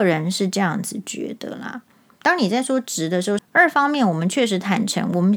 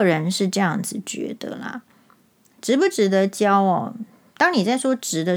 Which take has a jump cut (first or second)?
first